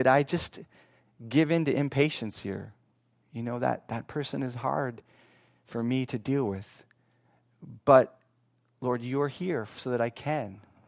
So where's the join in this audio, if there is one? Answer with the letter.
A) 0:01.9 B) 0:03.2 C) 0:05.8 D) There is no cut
D